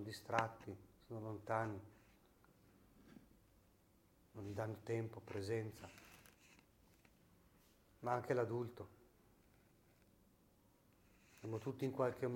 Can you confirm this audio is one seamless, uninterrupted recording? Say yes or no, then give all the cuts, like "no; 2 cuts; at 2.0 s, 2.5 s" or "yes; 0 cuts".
yes; 0 cuts